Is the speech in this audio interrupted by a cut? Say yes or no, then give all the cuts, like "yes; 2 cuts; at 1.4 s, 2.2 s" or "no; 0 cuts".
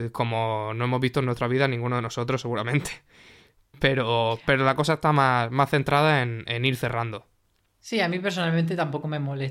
no; 0 cuts